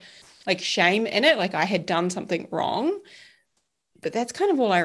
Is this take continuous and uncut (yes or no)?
yes